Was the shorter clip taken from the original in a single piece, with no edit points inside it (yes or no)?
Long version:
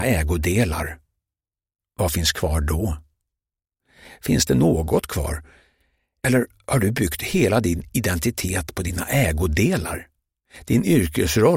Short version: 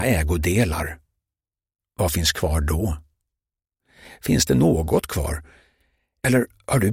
yes